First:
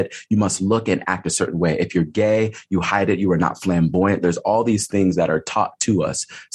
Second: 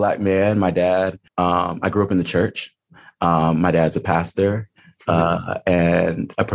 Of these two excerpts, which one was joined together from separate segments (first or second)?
second